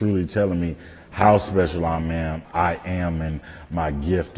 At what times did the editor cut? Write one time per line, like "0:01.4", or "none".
0:02.4